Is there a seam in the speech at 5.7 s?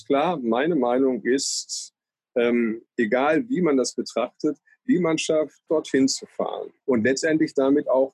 yes; 3 cuts; at 2.9 s, 5.7 s, 6.8 s

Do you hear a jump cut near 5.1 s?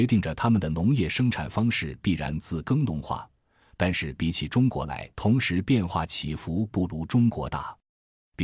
yes; 1 cut; at 5.1 s

